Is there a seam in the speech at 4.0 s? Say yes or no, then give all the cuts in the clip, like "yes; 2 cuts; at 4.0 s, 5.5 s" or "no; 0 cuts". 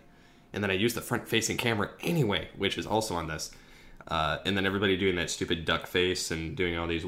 yes; 1 cut; at 4.0 s